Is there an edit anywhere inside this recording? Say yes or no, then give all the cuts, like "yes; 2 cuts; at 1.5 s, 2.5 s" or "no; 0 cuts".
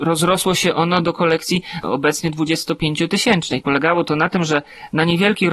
yes; 2 cuts; at 1.0 s, 3.6 s